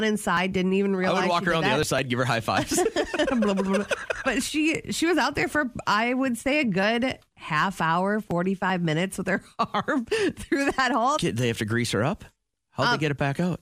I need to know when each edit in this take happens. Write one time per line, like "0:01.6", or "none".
0:11.2